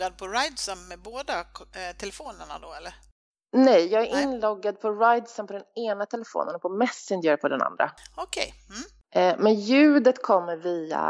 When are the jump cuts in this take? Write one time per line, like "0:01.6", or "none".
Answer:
none